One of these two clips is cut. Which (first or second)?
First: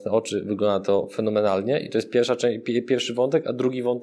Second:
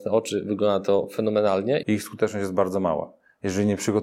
second